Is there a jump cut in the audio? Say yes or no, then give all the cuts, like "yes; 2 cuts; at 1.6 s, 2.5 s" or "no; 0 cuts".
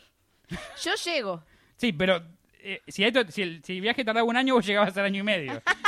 no; 0 cuts